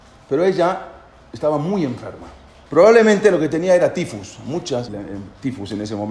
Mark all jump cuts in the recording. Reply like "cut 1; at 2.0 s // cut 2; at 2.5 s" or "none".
cut 1; at 2.7 s // cut 2; at 4.9 s